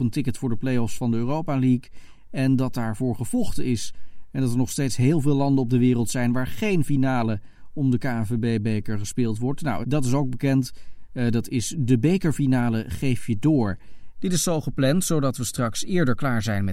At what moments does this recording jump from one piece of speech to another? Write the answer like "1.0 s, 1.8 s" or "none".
9.8 s, 14.1 s